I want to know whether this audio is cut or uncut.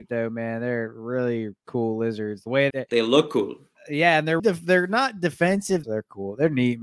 cut